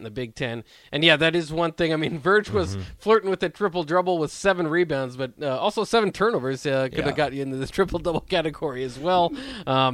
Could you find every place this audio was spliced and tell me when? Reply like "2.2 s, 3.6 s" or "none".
none

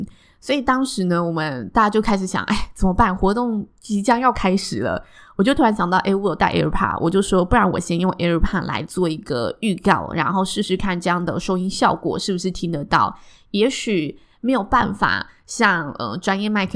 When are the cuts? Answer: none

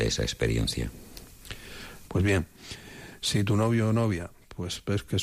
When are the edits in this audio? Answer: 2.1 s

